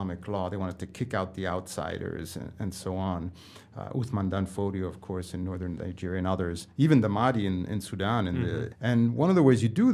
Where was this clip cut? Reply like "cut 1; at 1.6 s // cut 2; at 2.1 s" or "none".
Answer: cut 1; at 8.7 s